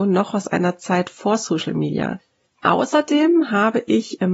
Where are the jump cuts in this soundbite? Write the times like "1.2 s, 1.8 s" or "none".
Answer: 2.4 s